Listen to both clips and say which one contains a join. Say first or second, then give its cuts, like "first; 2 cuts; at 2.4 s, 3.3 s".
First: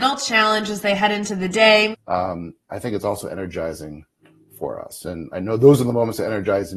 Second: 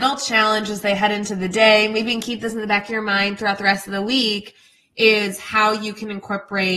first; 1 cut; at 1.9 s